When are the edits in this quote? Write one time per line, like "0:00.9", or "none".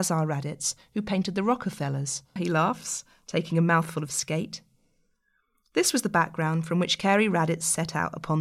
0:02.4